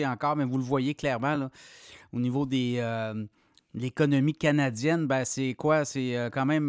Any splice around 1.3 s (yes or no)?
no